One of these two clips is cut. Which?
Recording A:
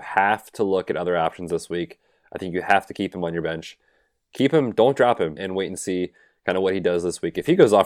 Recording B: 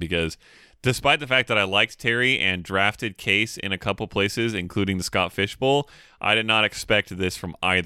A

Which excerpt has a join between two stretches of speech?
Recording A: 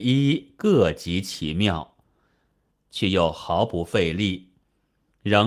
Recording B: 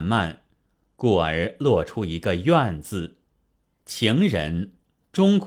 A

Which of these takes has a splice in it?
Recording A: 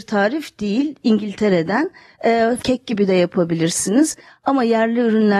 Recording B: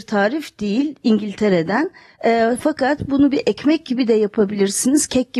A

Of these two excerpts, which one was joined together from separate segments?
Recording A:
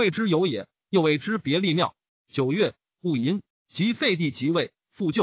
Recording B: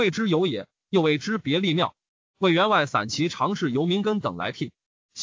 A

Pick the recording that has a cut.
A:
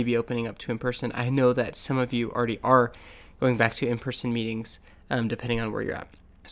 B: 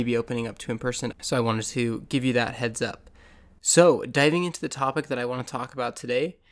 B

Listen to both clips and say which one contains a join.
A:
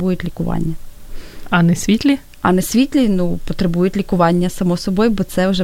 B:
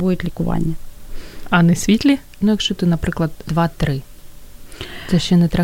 B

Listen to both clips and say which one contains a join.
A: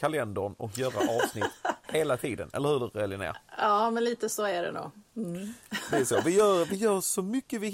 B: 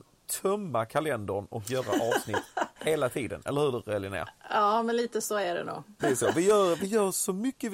B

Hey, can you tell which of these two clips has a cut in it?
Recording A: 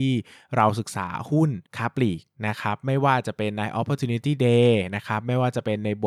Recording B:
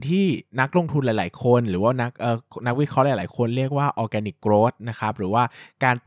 A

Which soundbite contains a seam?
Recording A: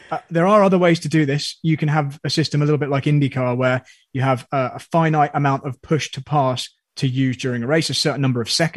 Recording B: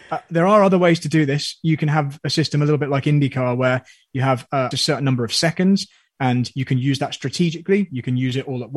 B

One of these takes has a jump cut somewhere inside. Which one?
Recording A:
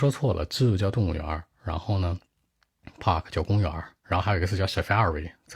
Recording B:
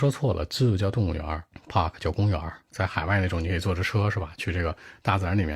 B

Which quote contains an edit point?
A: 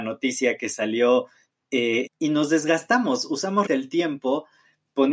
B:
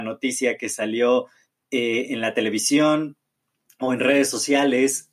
A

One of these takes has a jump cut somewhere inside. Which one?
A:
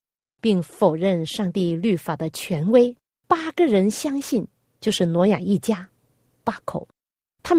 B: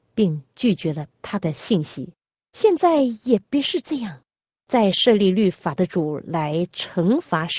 A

